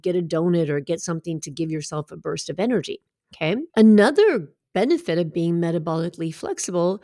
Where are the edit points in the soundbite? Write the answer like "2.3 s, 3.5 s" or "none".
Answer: 3.7 s